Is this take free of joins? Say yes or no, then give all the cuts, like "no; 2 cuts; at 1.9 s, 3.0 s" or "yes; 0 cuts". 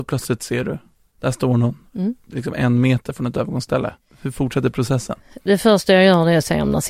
yes; 0 cuts